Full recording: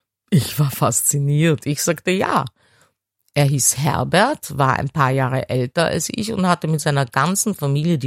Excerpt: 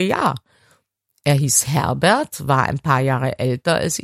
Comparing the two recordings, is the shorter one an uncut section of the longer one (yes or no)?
yes